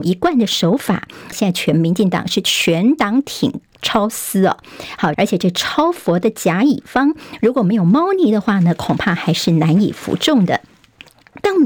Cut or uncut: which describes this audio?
cut